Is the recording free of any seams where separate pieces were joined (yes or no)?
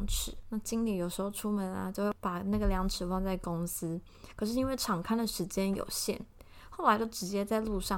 yes